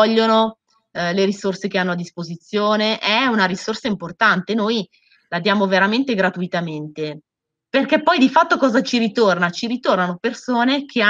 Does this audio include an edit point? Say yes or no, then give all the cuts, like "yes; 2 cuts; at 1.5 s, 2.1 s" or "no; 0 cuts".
no; 0 cuts